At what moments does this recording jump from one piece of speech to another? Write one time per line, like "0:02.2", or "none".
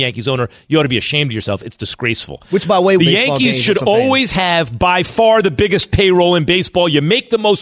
0:03.0